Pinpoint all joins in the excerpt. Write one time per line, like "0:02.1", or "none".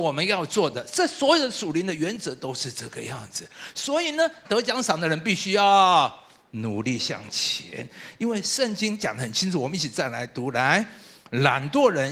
0:04.4